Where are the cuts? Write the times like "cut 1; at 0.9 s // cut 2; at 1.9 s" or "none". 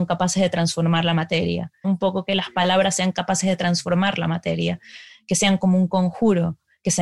cut 1; at 1.8 s